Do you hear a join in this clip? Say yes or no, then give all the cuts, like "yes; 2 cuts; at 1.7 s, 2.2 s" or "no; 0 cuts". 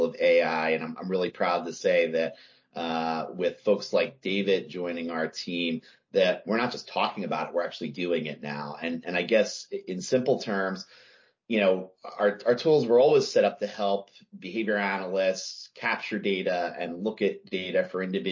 no; 0 cuts